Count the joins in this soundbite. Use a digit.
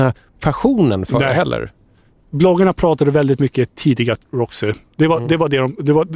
1